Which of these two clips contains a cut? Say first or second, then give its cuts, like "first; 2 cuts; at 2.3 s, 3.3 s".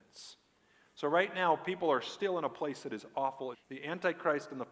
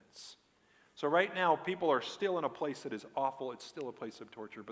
first; 1 cut; at 3.5 s